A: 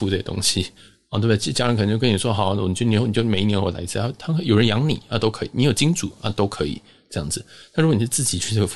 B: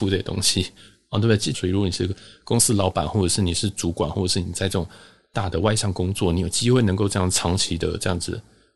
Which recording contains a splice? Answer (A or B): B